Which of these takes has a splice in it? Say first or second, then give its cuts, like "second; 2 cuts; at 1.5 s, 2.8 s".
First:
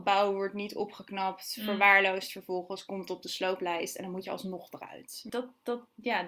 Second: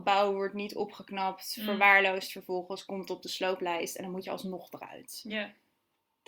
first; 1 cut; at 5.3 s